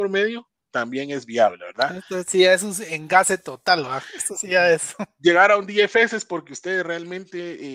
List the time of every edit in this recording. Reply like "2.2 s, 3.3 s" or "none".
none